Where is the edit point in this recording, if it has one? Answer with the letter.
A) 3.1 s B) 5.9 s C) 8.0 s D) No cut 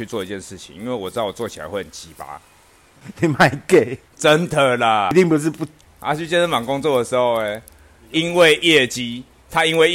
B